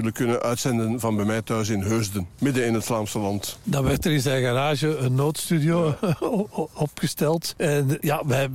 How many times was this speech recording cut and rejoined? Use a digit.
0